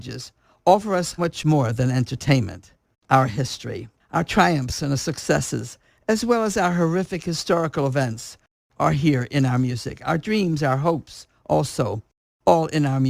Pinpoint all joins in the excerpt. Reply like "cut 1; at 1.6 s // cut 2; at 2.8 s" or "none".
cut 1; at 1.2 s